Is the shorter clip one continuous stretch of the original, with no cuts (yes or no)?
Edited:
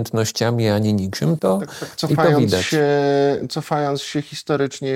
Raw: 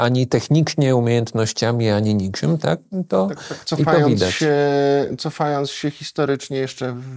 no